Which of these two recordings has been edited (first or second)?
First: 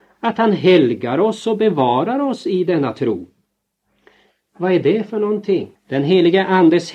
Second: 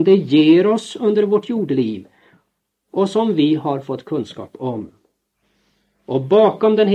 first